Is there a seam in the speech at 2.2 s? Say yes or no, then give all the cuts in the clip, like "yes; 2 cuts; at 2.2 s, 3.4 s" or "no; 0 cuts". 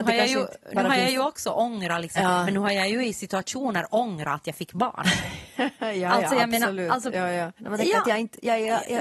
yes; 2 cuts; at 2.2 s, 7.6 s